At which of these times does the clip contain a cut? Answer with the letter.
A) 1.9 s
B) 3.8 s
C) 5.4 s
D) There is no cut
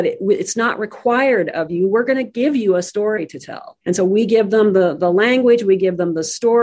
B